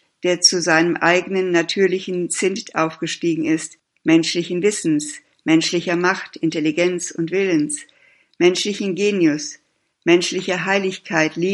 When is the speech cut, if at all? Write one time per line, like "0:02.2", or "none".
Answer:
0:03.9

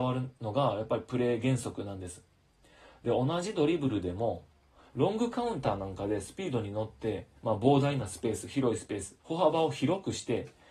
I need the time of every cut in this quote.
0:07.4
0:09.2

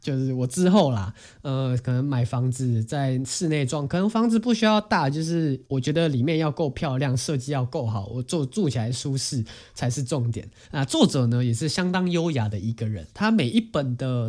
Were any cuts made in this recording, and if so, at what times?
0:10.7

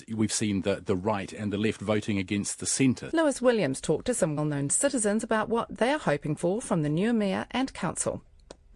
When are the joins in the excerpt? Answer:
0:03.1
0:04.4

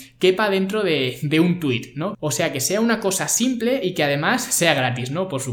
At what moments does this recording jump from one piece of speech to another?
0:02.1

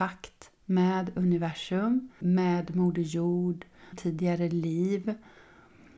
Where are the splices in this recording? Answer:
0:02.2
0:03.9

